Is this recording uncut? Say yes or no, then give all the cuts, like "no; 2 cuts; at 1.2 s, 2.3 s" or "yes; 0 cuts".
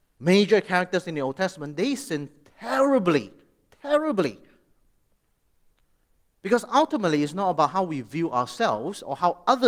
yes; 0 cuts